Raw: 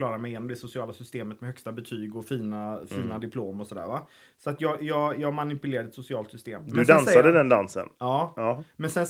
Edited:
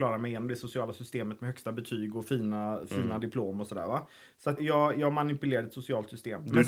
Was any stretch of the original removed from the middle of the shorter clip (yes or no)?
yes